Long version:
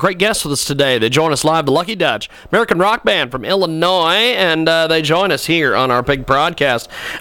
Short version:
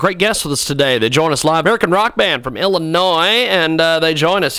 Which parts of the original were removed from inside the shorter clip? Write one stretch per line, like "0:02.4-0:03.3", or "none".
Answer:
0:01.6-0:02.5